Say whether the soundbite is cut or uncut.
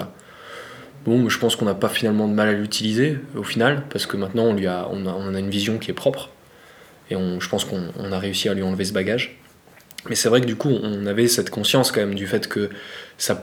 uncut